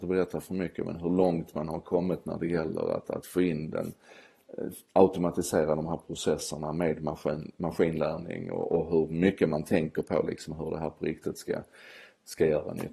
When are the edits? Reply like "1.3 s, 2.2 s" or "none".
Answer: none